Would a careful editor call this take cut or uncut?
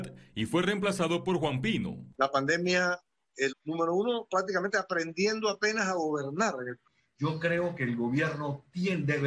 cut